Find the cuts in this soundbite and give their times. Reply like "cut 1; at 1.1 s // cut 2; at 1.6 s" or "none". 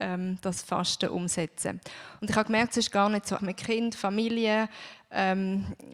cut 1; at 2.2 s // cut 2; at 3.4 s

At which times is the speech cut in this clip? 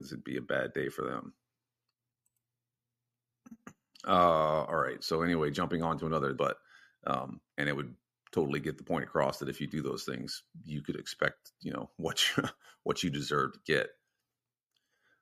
cut 1; at 6.4 s // cut 2; at 7.5 s

